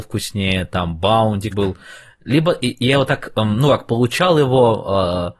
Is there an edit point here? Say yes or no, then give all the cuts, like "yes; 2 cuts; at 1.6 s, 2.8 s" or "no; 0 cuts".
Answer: yes; 1 cut; at 1.5 s